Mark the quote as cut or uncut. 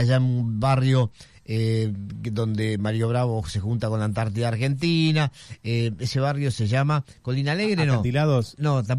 uncut